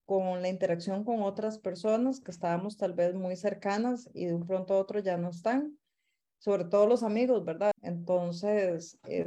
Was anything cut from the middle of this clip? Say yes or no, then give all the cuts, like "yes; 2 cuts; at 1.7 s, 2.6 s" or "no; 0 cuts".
yes; 1 cut; at 7.7 s